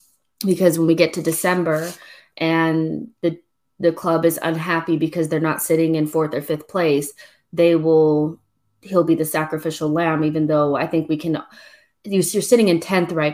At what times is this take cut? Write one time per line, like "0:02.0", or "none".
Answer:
none